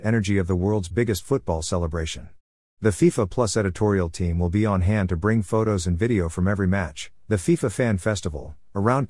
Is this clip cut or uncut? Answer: uncut